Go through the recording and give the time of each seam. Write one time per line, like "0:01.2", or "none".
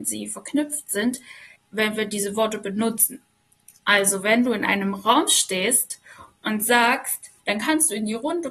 0:01.6
0:07.4

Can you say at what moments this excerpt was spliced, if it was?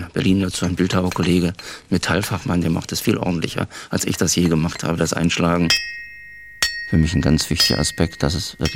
none

